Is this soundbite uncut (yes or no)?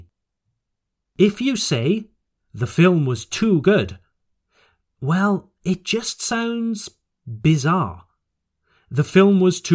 yes